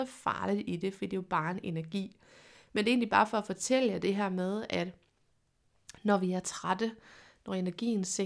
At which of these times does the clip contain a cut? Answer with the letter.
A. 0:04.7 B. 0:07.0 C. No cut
C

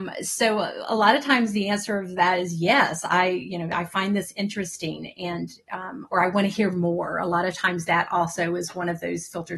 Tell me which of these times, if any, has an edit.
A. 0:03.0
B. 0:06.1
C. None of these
B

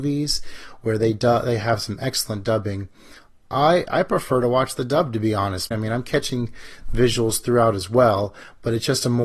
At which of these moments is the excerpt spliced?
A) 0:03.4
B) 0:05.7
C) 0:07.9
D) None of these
B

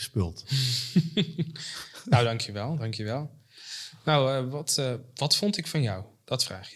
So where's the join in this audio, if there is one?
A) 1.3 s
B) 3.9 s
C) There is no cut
C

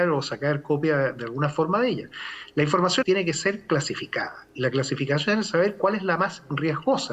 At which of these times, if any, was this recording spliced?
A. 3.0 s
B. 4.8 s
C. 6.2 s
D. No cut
A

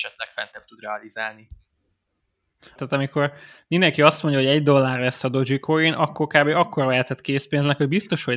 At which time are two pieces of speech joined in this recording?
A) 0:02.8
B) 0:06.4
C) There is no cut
A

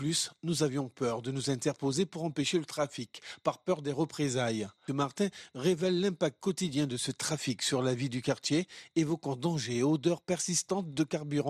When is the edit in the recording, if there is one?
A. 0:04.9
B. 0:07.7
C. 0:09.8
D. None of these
A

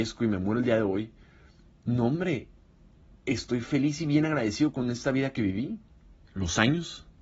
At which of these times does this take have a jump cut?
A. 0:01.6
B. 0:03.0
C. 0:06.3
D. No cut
C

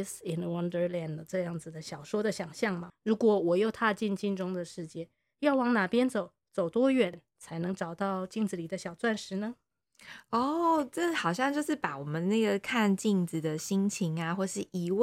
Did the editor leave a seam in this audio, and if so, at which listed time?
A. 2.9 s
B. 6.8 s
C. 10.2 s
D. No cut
A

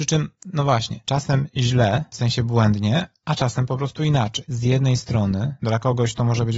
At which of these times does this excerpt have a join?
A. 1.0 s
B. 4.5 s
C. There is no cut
B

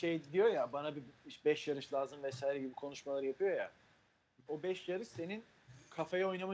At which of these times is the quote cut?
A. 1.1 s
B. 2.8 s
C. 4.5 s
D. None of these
C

